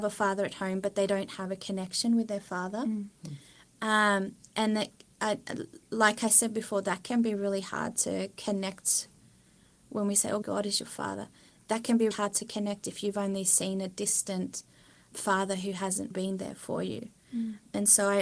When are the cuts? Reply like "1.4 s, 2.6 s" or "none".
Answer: 10.4 s, 12.1 s, 16.1 s